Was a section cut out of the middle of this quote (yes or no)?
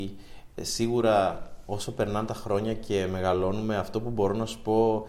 no